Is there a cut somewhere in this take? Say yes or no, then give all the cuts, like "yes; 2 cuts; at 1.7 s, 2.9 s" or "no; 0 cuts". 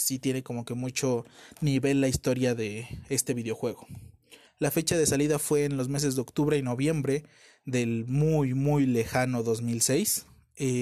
yes; 1 cut; at 4.5 s